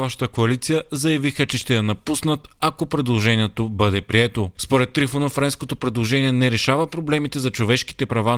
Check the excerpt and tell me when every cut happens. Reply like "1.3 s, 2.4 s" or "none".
4.5 s